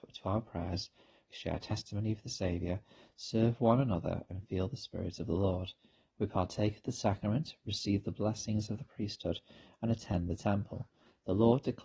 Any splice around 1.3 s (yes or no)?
yes